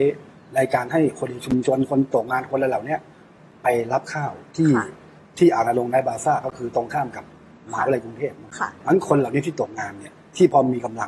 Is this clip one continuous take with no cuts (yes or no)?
yes